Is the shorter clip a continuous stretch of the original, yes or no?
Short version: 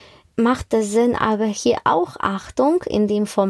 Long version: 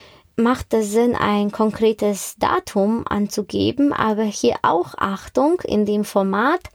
no